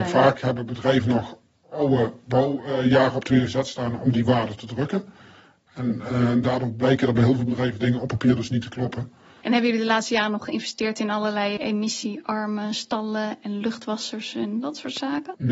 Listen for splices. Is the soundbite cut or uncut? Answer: cut